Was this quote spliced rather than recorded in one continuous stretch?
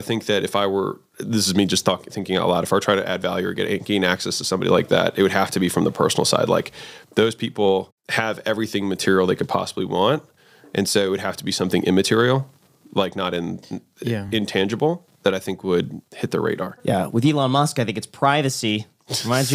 no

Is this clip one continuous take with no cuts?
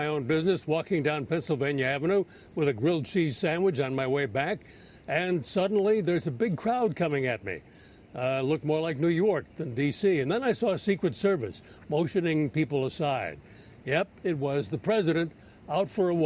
yes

